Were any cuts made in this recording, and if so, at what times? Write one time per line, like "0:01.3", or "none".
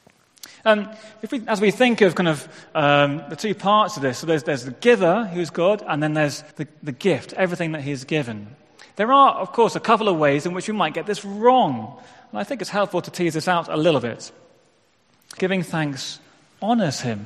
0:06.5
0:15.4

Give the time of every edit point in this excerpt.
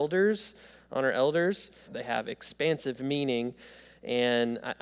0:01.8

